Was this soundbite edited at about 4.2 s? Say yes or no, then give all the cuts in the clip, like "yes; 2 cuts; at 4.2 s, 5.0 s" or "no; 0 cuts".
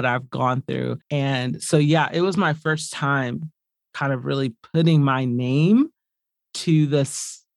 no; 1 cut; at 1.0 s